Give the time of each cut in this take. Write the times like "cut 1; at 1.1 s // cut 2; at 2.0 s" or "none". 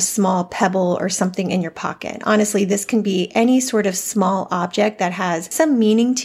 none